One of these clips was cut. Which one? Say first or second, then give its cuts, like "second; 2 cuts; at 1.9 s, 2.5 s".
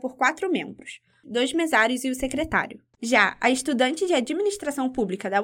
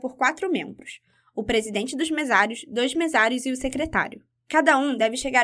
first; 2 cuts; at 1.2 s, 2.9 s